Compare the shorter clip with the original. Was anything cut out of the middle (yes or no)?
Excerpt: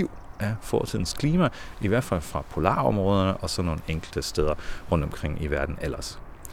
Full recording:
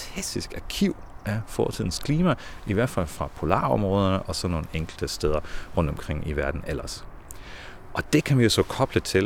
no